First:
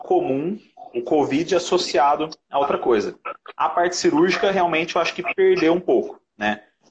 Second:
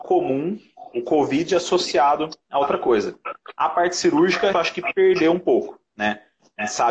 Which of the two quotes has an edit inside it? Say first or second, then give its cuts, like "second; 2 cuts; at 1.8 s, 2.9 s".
second; 1 cut; at 4.5 s